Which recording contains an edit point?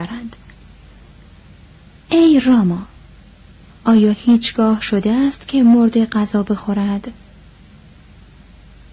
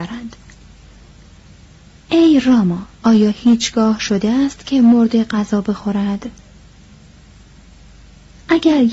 second; 1 cut; at 2.9 s

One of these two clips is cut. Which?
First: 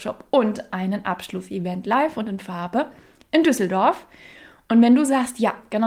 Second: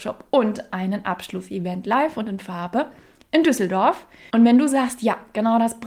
second; 1 cut; at 4.3 s

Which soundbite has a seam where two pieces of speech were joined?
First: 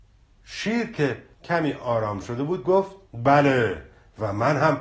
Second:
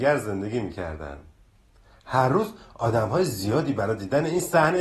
first; 2 cuts; at 1.3 s, 3.0 s

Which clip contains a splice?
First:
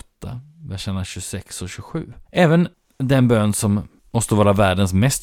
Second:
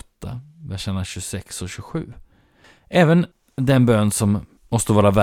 first; 1 cut; at 2.3 s

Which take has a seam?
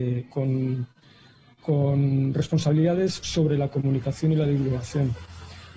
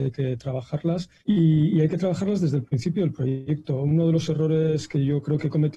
second; 1 cut; at 1.2 s

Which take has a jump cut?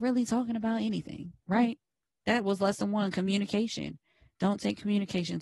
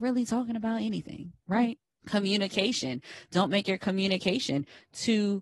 second; 1 cut; at 2.0 s

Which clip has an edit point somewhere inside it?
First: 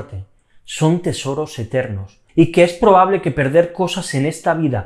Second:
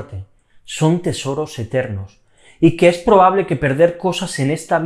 first; 1 cut; at 2.3 s

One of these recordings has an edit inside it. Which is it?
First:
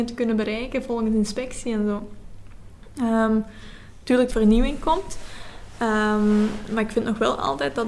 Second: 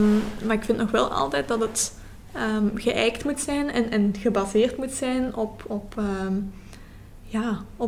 first; 1 cut; at 4.3 s

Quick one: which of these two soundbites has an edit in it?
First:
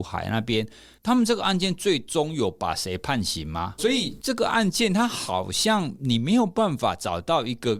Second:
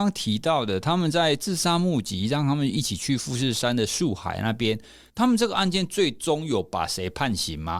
first; 1 cut; at 3.8 s

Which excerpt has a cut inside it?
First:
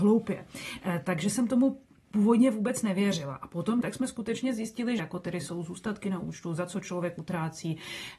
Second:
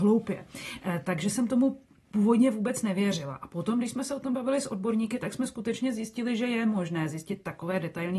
first; 2 cuts; at 3.8 s, 5.0 s

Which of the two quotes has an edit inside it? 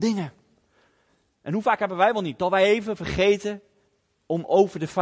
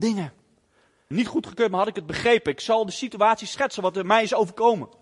second; 1 cut; at 1.1 s

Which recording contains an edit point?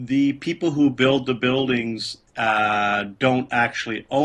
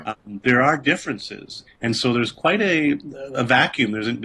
second; 1 cut; at 1.7 s

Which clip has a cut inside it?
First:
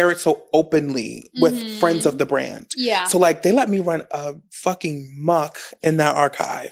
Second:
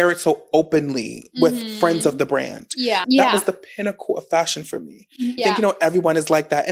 second; 2 cuts; at 3.0 s, 5.4 s

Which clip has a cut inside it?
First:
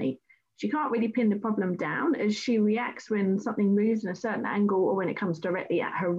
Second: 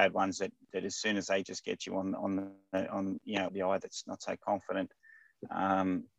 second; 1 cut; at 3.5 s

